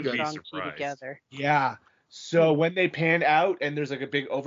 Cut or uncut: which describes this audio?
cut